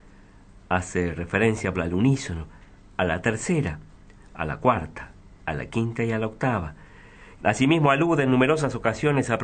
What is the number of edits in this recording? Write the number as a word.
two